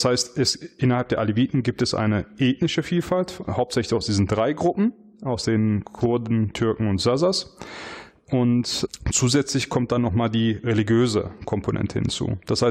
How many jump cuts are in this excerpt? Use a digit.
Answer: 0